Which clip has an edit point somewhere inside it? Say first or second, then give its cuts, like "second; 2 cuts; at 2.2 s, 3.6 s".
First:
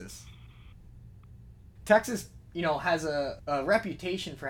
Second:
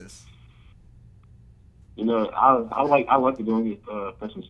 first; 1 cut; at 1.8 s